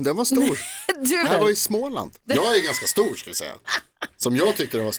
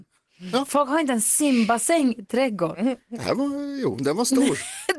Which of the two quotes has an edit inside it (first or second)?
first